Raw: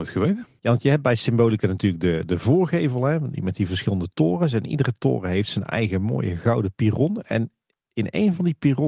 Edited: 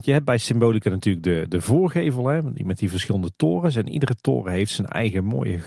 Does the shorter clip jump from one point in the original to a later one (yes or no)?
no